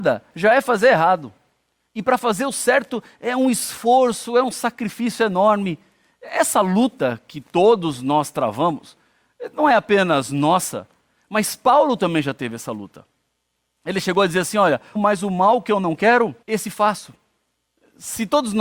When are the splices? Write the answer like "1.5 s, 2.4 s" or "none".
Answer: 15.0 s, 16.4 s